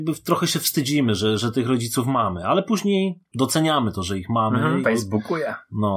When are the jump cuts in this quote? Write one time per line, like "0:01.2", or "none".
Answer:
0:04.8